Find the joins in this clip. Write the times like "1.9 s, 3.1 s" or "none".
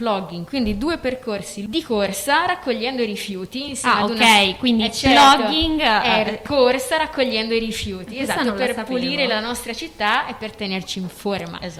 none